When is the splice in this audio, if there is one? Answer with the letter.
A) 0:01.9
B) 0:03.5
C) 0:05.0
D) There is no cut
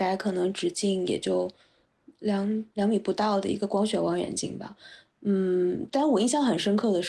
D